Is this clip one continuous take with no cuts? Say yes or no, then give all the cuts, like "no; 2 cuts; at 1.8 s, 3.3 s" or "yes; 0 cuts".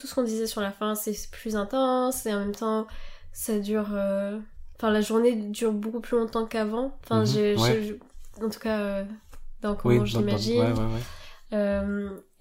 yes; 0 cuts